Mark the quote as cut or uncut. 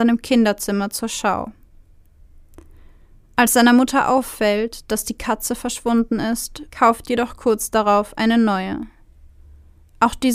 cut